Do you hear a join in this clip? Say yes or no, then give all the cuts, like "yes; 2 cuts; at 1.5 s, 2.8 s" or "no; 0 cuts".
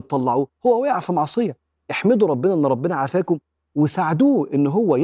no; 0 cuts